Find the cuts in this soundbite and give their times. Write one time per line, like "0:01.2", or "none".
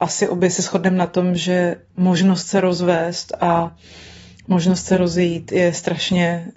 none